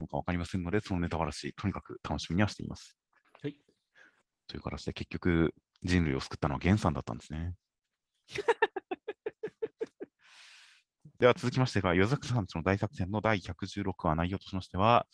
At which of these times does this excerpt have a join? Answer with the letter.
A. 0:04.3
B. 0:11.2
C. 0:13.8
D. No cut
B